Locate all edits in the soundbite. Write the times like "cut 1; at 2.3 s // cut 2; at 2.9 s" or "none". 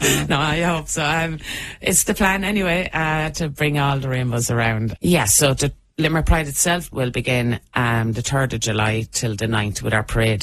cut 1; at 5.0 s // cut 2; at 6.9 s

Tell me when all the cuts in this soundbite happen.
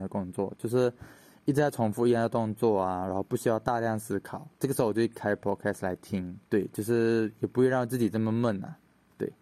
cut 1; at 4.5 s // cut 2; at 6.5 s

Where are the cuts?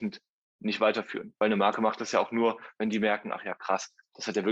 none

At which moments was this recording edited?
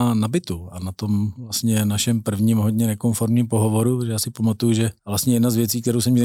cut 1; at 5.0 s

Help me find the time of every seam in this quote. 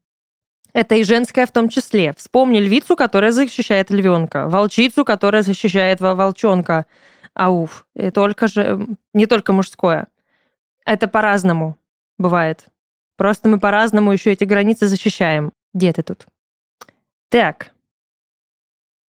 cut 1; at 8.1 s // cut 2; at 15.5 s

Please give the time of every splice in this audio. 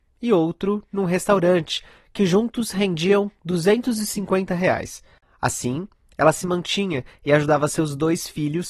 none

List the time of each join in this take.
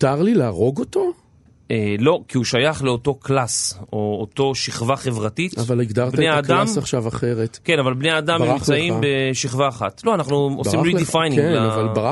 none

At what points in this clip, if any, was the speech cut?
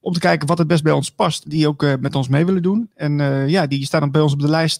cut 1; at 1.4 s

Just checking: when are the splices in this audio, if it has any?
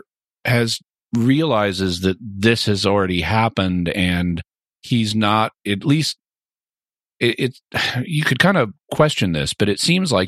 none

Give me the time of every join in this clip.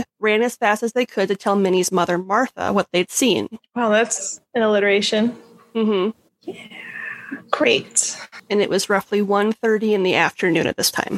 cut 1; at 6.3 s

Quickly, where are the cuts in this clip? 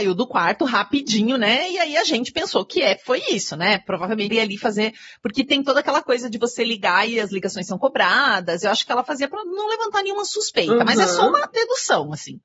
cut 1; at 4.3 s

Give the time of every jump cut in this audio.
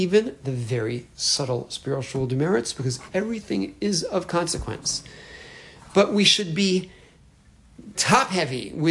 cut 1; at 7.9 s

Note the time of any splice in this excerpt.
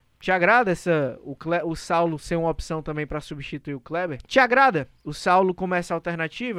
cut 1; at 4.3 s

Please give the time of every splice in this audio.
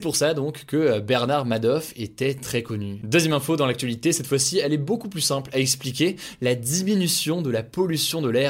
none

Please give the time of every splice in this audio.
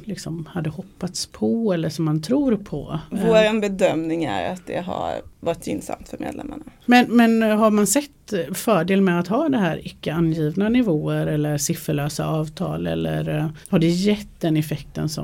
cut 1; at 6.8 s // cut 2; at 13.6 s

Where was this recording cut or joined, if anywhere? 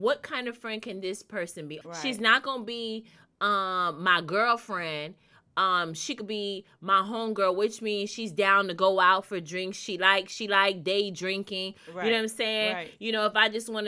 cut 1; at 1.8 s

